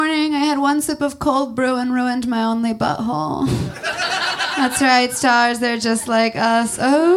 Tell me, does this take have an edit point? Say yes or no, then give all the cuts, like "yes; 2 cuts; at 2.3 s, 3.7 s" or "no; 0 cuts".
no; 0 cuts